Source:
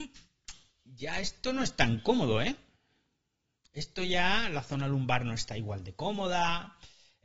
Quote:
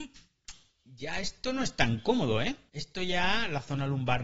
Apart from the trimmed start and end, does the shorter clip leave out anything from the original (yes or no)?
yes